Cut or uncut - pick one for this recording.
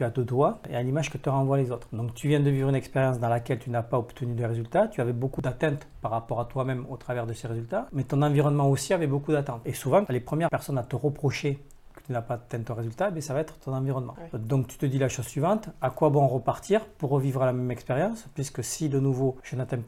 cut